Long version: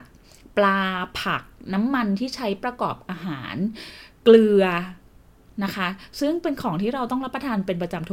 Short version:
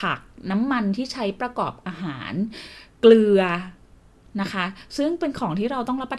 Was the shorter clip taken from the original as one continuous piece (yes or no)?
yes